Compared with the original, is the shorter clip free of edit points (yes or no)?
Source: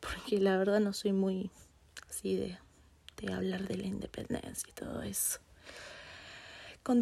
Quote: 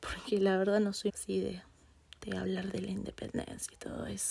no